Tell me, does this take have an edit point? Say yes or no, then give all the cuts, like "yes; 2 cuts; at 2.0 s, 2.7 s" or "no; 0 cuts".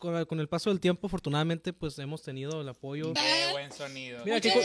yes; 1 cut; at 3.2 s